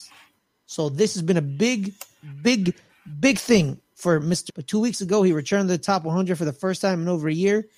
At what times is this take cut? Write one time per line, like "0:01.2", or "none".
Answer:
0:04.5